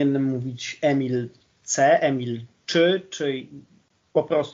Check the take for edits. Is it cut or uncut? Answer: uncut